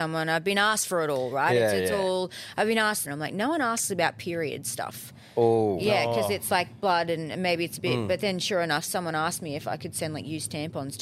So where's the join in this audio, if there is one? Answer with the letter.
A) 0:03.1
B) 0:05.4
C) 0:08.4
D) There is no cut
A